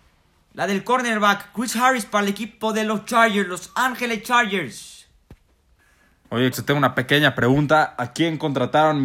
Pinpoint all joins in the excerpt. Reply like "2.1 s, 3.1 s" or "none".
6.5 s